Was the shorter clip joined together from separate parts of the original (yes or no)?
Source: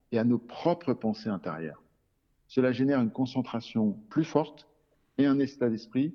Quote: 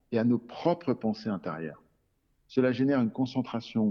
no